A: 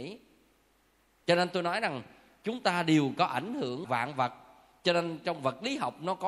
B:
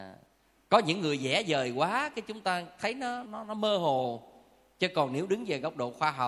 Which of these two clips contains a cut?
B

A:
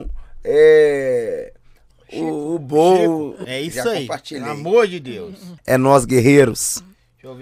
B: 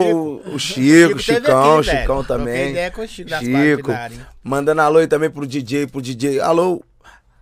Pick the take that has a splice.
A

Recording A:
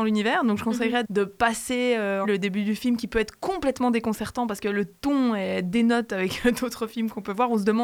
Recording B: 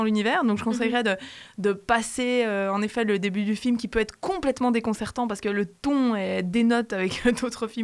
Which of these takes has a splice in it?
A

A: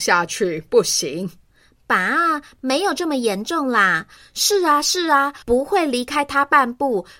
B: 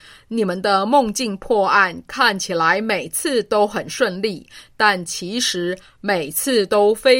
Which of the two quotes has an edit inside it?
A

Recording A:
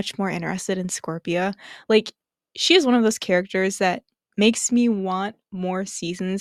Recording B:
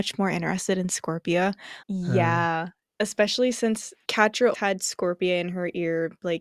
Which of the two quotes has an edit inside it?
B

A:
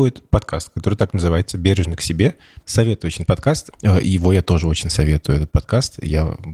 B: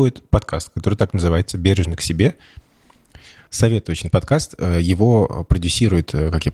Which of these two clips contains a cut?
A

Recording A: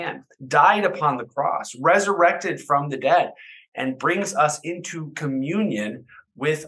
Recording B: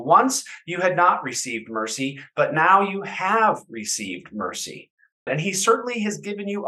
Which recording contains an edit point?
B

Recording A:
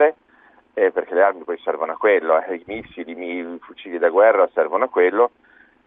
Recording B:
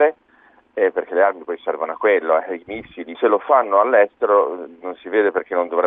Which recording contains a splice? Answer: B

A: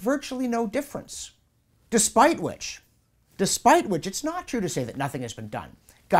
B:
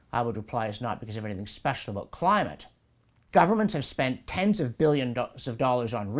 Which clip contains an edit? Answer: B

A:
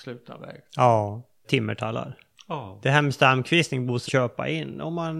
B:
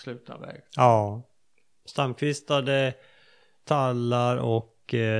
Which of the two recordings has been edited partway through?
A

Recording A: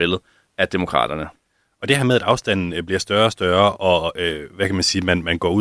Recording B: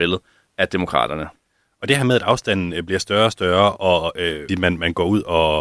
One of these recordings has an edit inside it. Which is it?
B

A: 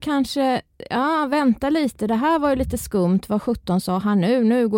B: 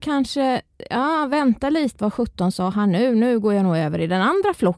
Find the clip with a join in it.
B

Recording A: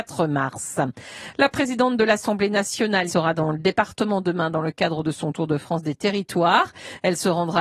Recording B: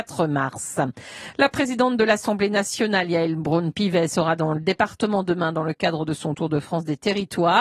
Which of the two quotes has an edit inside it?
A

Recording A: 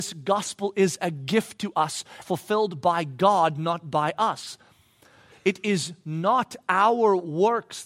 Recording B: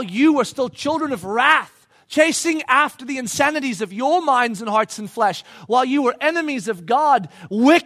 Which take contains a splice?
A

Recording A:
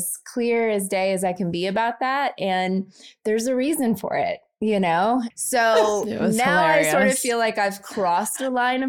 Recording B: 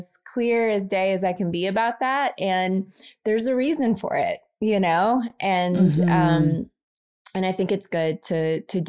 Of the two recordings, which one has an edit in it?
A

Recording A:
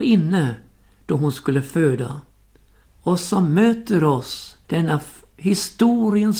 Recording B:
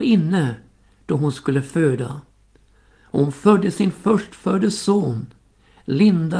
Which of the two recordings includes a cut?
A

